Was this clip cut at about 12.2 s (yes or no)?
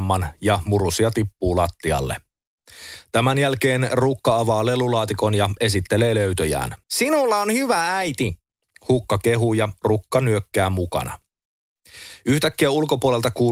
no